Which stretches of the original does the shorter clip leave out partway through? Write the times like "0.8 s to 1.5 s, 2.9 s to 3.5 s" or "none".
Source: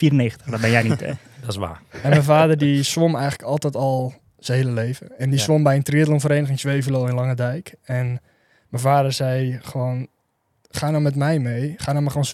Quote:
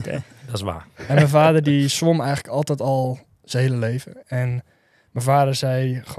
5.2 s to 7.8 s